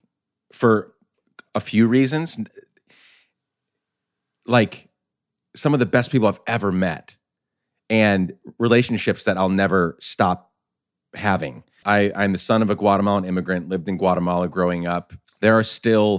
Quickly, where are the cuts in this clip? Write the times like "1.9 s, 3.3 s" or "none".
11.8 s, 15.2 s